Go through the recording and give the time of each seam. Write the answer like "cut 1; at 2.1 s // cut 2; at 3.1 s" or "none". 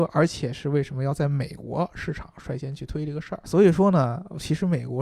cut 1; at 3.4 s